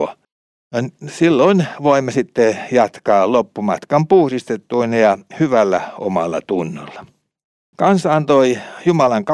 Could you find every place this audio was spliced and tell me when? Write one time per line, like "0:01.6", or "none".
none